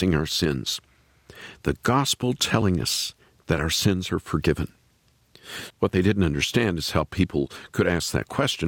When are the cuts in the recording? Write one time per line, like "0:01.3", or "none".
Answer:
0:05.7